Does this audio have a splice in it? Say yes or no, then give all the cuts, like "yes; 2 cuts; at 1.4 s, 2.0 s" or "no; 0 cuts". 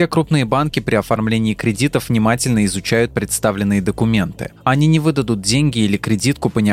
no; 0 cuts